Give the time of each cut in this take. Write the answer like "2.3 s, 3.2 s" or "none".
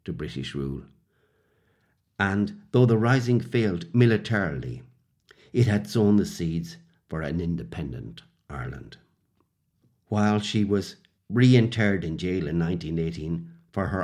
none